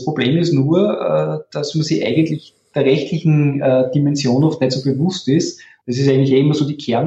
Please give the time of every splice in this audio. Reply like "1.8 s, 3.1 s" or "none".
5.8 s